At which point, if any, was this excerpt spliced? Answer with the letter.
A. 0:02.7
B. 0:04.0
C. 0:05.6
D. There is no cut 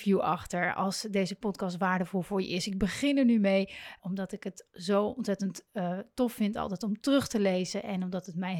B